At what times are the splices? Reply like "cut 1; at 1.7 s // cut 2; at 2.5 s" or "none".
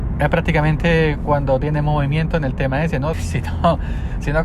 cut 1; at 3.1 s